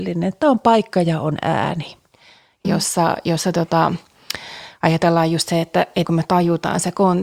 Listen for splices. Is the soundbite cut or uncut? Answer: cut